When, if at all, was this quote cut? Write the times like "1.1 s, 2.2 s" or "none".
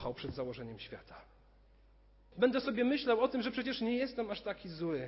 2.3 s